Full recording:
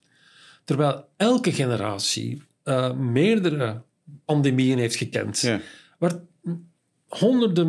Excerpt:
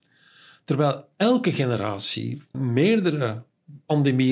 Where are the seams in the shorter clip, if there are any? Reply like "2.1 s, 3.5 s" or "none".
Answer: 2.5 s